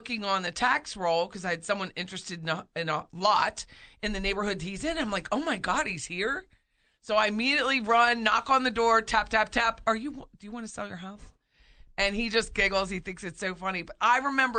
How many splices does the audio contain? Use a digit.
0